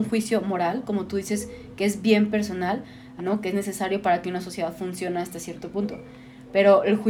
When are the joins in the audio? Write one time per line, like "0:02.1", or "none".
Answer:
0:03.2